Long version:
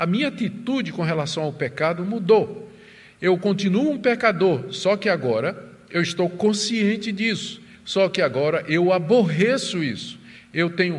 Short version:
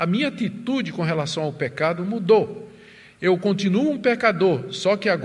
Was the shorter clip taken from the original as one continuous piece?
yes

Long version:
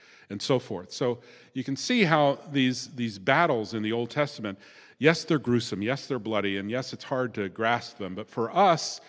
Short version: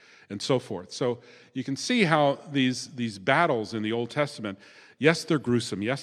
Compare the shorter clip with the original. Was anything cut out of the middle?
no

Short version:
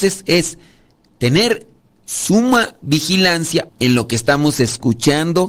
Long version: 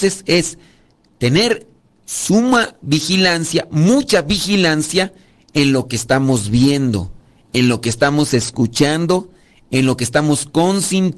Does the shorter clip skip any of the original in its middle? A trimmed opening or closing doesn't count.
yes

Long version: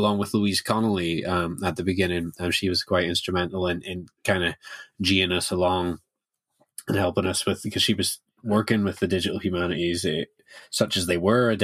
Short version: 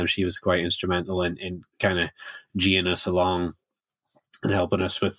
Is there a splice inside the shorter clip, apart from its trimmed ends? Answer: no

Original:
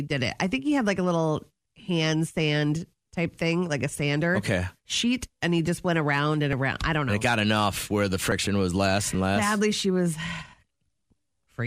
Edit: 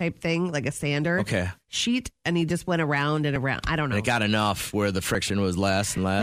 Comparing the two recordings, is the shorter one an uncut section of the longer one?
yes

